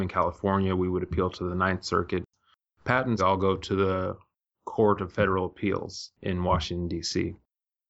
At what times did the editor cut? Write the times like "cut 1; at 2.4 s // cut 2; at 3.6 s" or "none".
cut 1; at 3.2 s

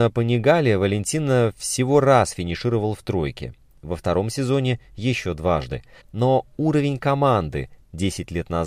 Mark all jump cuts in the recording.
cut 1; at 6.0 s

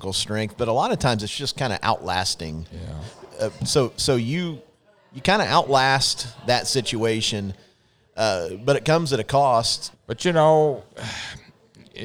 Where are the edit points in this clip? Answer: cut 1; at 3.6 s // cut 2; at 9.9 s

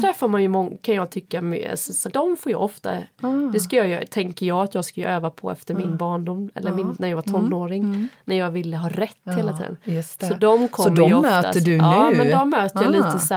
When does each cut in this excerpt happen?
cut 1; at 2.1 s

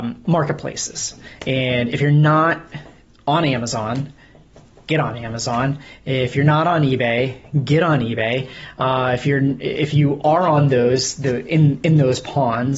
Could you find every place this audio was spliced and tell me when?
none

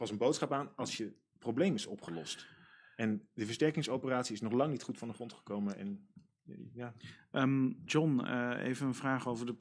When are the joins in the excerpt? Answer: cut 1; at 7.9 s

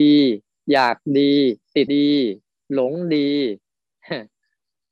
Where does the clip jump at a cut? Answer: cut 1; at 1.9 s

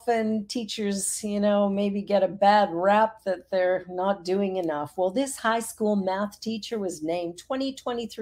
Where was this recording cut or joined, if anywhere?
none

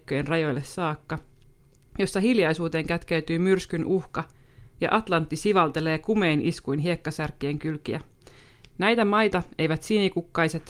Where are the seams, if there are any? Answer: none

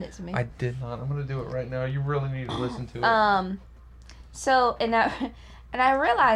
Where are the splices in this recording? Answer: none

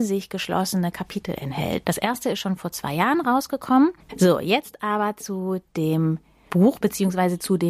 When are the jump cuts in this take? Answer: cut 1; at 1.8 s // cut 2; at 4.1 s

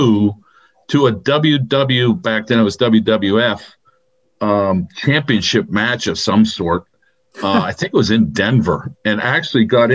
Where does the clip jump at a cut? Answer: none

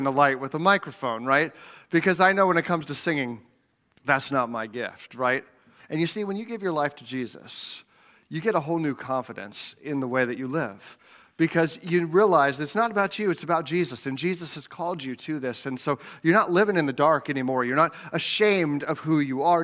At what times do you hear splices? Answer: cut 1; at 5.8 s

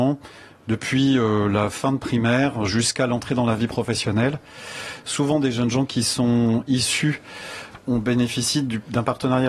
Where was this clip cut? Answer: cut 1; at 7.8 s

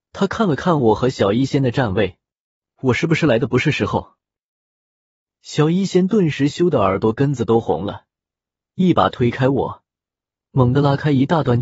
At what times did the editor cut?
none

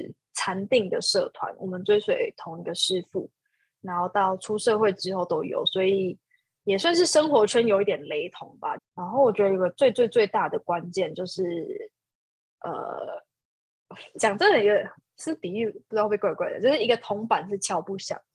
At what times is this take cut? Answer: cut 1; at 8.8 s

